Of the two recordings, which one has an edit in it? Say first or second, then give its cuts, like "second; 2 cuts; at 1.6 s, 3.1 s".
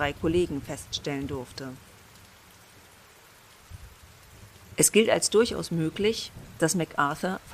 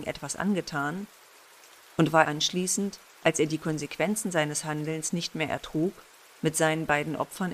second; 1 cut; at 2.2 s